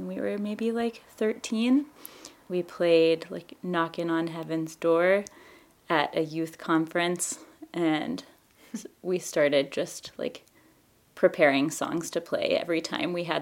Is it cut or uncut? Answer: uncut